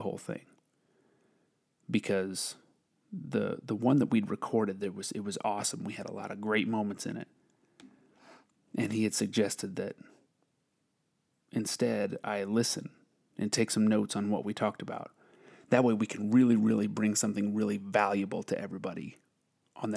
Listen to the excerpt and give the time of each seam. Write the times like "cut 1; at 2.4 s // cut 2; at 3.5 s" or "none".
none